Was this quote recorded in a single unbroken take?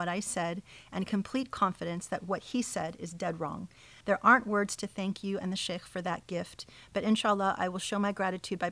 no; 1 cut; at 4.0 s

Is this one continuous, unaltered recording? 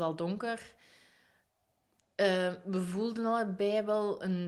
yes; 0 cuts

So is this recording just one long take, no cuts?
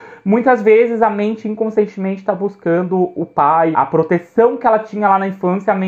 no; 1 cut; at 3.7 s

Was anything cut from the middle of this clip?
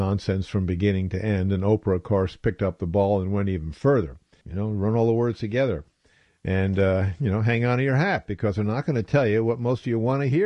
yes; 1 cut; at 4.4 s

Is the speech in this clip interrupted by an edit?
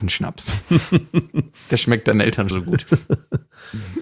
yes; 1 cut; at 2.5 s

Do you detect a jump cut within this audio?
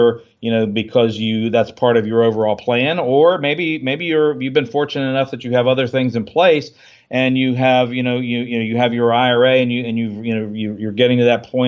no; 0 cuts

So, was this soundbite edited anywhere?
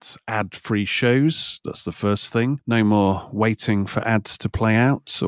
no; 0 cuts

